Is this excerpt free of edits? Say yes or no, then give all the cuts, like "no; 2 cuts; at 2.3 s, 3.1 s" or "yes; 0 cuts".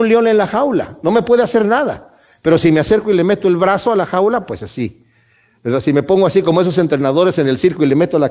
yes; 0 cuts